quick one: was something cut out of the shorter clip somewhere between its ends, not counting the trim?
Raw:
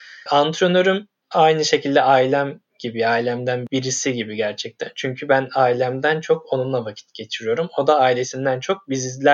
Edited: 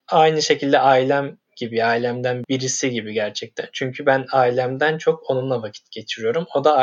no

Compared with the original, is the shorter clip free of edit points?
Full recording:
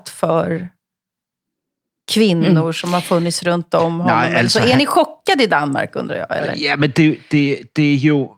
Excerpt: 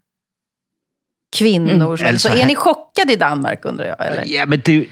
no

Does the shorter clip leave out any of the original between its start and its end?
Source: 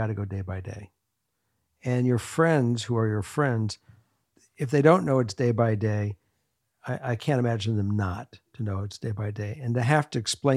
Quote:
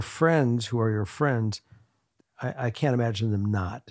yes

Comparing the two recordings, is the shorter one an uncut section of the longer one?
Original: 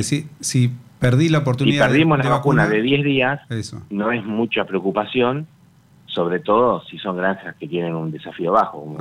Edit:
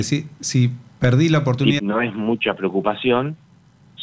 no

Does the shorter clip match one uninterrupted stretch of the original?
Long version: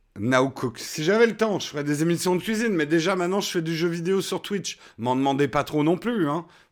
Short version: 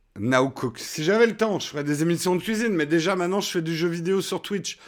yes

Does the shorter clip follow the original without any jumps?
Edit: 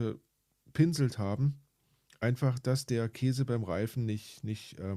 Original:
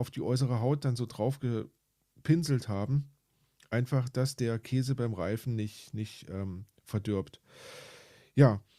yes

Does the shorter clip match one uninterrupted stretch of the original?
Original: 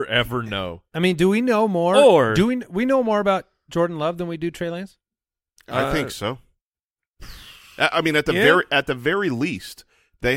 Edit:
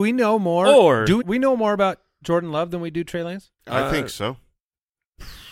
no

